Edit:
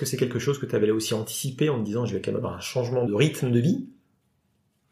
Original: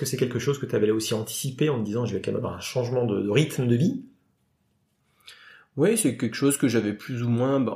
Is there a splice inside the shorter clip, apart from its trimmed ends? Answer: yes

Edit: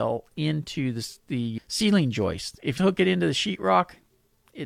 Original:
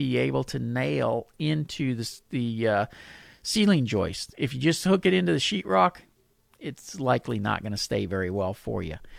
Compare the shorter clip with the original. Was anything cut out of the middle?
yes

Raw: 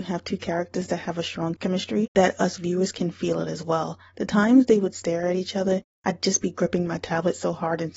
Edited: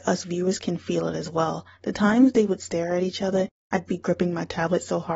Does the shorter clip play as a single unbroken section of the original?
no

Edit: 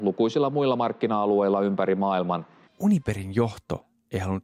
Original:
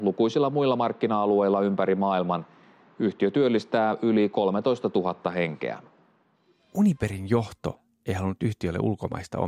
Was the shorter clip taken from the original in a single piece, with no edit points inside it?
no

